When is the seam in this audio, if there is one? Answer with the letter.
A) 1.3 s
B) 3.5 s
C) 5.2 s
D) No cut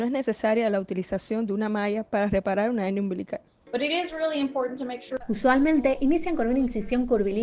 C